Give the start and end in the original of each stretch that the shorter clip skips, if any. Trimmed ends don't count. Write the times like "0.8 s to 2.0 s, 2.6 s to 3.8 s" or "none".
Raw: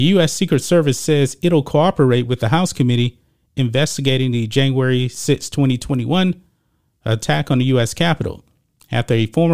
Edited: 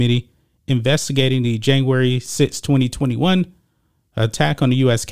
none